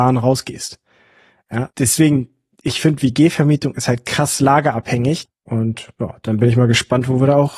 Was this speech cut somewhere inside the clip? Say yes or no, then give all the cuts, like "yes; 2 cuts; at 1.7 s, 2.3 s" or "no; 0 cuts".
yes; 2 cuts; at 1.7 s, 5.3 s